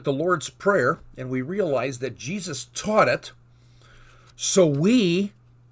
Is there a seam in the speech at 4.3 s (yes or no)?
no